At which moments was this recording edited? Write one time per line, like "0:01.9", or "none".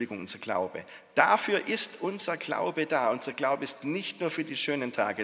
none